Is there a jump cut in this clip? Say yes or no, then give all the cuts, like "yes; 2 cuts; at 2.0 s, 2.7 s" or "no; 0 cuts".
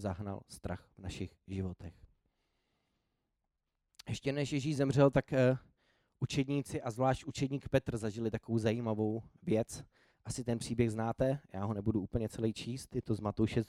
no; 0 cuts